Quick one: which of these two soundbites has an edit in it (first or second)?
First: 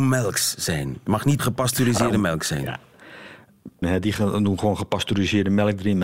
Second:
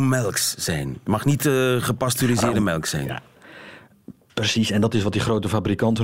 first